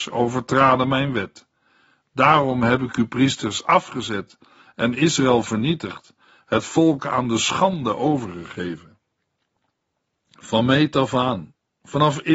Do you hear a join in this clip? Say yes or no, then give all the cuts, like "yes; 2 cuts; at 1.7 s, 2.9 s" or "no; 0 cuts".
no; 0 cuts